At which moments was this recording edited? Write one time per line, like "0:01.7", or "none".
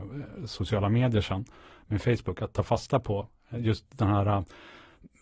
none